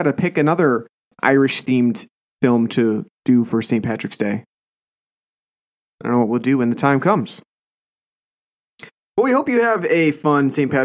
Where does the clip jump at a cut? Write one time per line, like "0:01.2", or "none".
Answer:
0:01.1